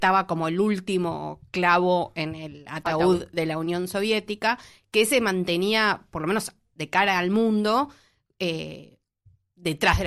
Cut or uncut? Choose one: uncut